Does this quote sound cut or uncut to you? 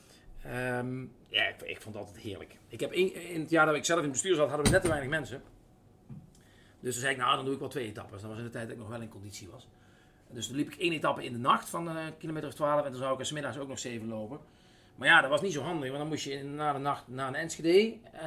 uncut